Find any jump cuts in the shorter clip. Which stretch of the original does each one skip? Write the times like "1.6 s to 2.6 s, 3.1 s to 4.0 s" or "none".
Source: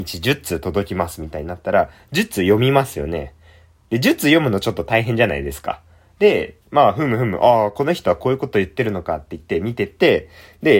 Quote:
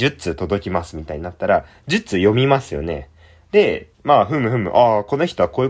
3.6 s to 6.1 s